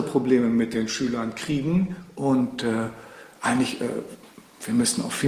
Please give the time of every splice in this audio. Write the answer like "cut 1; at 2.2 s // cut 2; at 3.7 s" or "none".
none

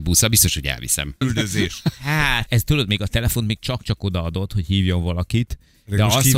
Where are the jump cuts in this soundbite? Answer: cut 1; at 1.2 s // cut 2; at 2.5 s

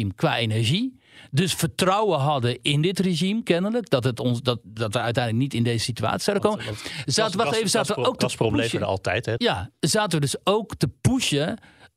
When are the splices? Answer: cut 1; at 9.4 s

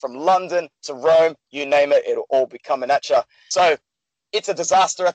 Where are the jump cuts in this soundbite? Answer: cut 1; at 1.4 s // cut 2; at 3.5 s

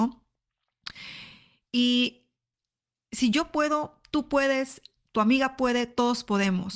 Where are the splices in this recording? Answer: none

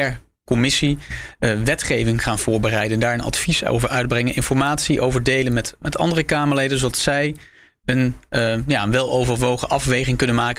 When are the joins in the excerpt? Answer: none

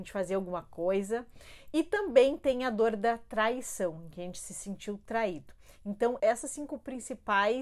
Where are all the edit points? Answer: cut 1; at 6.2 s

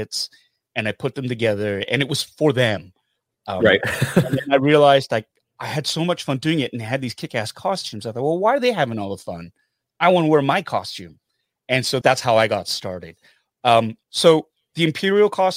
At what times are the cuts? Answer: cut 1; at 12.0 s // cut 2; at 14.0 s

